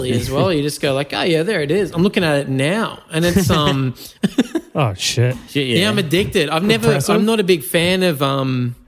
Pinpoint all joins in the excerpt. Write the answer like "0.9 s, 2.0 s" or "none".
none